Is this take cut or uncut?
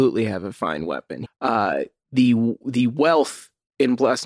cut